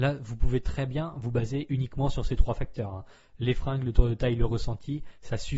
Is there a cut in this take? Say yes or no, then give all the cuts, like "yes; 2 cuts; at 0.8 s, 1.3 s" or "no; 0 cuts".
no; 0 cuts